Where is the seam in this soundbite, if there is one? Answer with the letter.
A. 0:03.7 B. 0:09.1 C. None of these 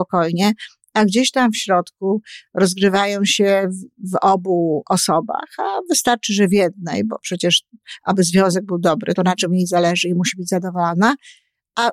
B